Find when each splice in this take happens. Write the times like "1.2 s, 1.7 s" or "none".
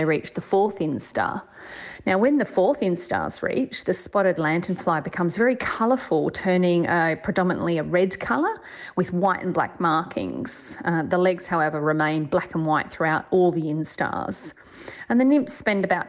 none